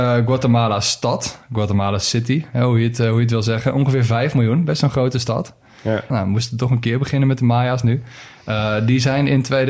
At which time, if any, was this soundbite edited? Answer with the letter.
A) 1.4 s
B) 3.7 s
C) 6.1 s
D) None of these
C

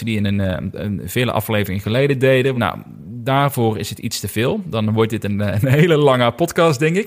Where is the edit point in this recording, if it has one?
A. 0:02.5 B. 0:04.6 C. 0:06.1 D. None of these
A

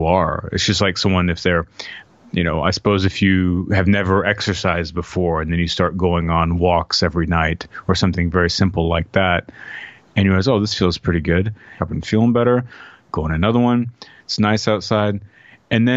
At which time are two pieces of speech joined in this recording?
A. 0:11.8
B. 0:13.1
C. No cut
A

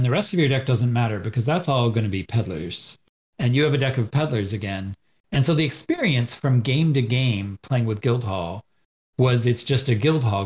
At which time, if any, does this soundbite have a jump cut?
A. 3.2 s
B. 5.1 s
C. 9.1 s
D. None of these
A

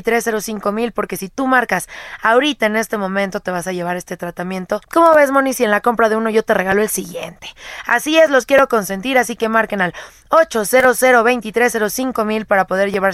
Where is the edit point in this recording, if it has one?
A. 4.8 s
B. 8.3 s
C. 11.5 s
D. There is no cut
A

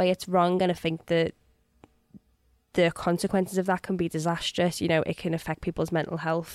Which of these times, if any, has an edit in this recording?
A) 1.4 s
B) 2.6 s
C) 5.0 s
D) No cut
D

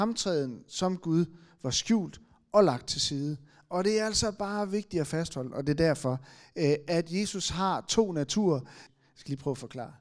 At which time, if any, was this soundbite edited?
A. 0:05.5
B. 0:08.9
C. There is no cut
B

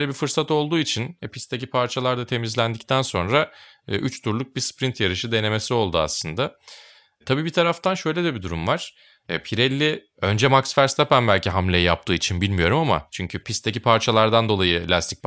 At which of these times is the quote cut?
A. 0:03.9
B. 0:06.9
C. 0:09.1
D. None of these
D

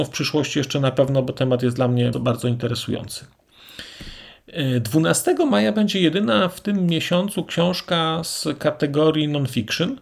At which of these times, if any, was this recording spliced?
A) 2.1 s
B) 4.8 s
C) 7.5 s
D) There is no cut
A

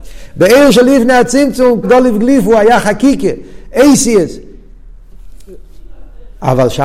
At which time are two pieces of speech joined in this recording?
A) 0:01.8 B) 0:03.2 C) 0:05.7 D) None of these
A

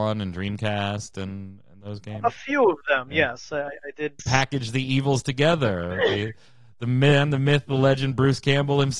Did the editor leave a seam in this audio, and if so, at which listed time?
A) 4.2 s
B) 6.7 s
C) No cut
A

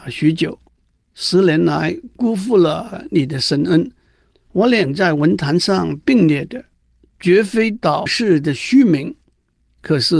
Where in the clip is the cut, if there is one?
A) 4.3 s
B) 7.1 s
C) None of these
A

